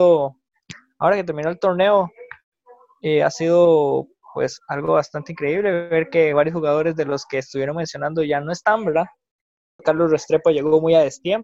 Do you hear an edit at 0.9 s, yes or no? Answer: no